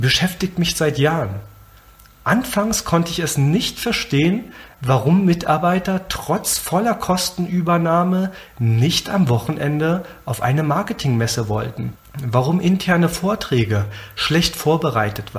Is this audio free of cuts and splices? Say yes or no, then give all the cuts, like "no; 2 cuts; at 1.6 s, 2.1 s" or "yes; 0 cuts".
yes; 0 cuts